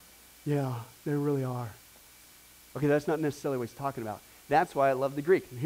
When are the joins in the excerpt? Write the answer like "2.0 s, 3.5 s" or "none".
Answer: none